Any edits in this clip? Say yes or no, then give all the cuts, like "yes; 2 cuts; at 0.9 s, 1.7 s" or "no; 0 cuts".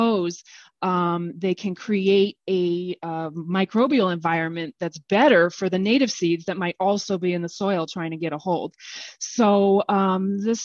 no; 0 cuts